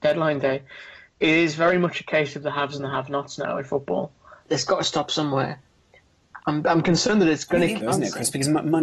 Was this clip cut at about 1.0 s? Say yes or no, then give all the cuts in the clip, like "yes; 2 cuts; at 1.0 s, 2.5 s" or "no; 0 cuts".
no; 3 cuts; at 4.4 s, 6.4 s, 7.8 s